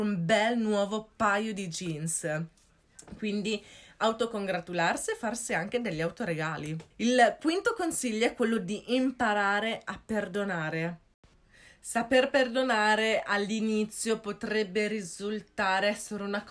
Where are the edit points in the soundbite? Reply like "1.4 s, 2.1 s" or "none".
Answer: 6.9 s